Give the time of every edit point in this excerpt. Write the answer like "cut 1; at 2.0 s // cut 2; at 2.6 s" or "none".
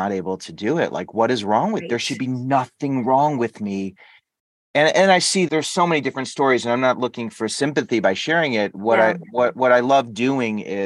cut 1; at 5.5 s